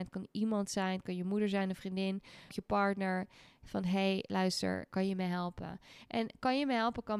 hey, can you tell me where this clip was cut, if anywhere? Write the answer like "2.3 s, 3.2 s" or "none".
2.5 s, 4.9 s